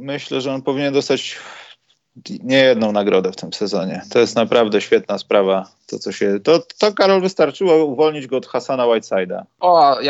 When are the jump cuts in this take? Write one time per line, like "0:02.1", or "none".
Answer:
none